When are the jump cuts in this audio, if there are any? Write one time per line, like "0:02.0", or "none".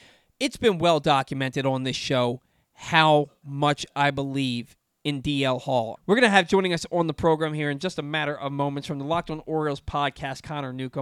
0:06.0